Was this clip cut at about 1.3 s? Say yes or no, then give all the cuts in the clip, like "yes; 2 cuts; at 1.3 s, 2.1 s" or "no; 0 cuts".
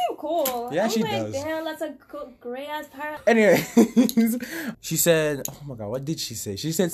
no; 2 cuts; at 3.2 s, 4.7 s